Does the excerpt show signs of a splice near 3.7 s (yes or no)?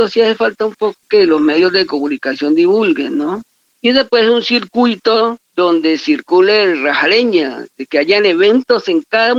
yes